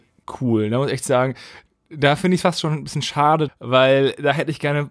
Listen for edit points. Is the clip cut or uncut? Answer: cut